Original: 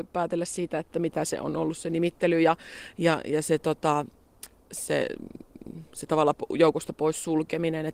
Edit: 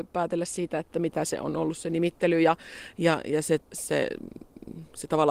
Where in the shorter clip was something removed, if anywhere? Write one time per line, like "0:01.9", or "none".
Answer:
0:03.6